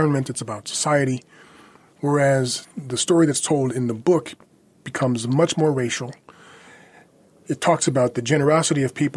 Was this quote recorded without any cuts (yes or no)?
yes